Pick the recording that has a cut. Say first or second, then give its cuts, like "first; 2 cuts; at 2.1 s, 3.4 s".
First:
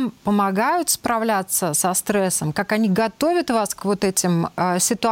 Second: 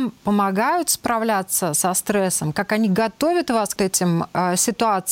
second; 1 cut; at 3.8 s